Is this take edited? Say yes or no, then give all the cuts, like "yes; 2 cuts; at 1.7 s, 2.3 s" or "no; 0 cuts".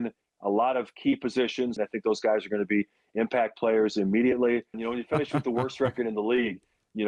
yes; 2 cuts; at 1.8 s, 4.7 s